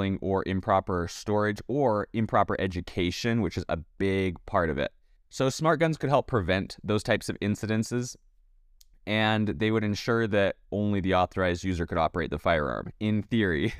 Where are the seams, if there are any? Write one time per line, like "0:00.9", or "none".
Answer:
0:05.2